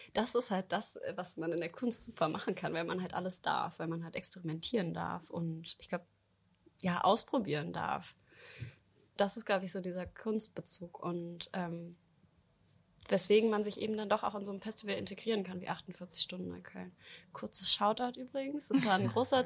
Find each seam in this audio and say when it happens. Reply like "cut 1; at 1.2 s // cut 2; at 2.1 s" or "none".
none